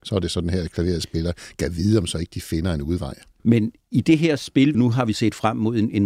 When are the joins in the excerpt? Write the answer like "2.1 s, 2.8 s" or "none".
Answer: 3.4 s, 4.7 s